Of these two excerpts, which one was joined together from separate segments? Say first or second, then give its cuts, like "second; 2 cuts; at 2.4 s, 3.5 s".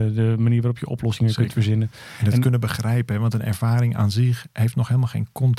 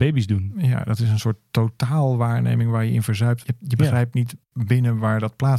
second; 1 cut; at 3.4 s